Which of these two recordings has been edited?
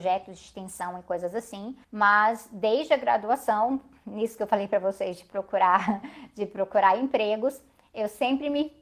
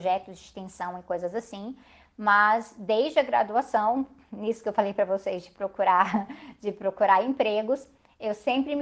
first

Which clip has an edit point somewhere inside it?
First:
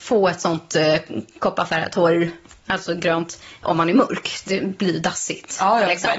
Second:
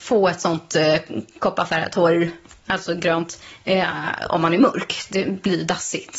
first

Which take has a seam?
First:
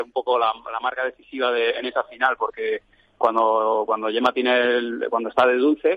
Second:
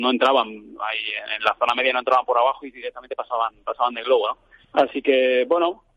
second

